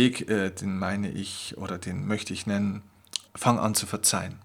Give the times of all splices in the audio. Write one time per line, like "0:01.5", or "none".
0:03.3